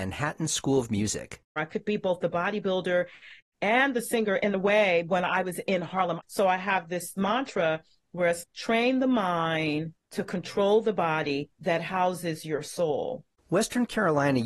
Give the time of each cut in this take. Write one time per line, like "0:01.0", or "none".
0:06.2
0:08.4

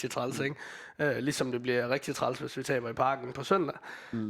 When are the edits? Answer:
none

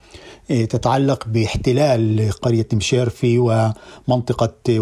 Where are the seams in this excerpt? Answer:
0:02.4

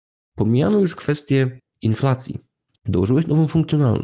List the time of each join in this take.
0:02.7

